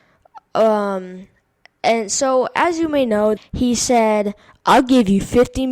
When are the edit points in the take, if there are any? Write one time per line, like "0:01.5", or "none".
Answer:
0:03.4